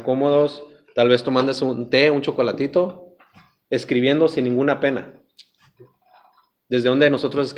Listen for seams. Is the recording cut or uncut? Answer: uncut